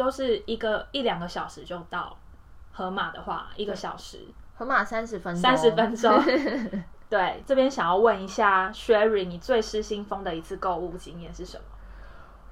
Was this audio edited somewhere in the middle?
no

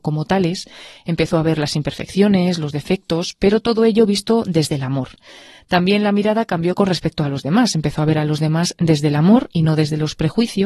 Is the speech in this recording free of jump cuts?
yes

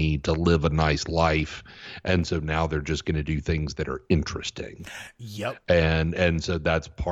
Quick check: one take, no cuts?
yes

